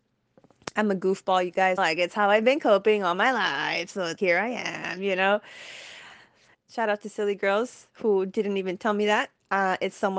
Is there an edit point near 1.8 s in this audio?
yes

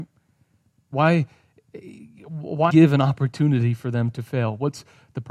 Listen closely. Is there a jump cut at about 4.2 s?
no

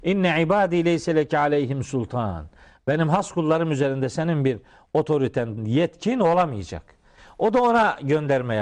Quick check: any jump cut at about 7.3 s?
no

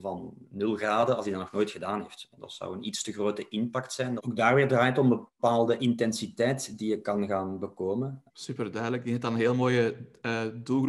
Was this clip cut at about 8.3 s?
yes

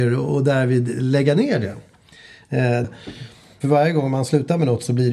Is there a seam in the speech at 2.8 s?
yes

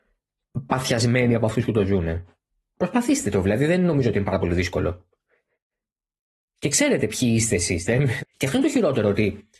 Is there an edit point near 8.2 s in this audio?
yes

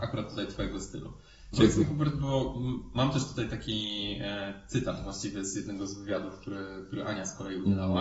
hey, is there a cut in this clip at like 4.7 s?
no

